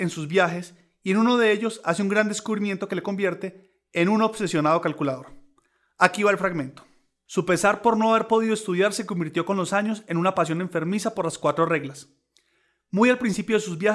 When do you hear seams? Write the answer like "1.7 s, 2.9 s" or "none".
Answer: 7.3 s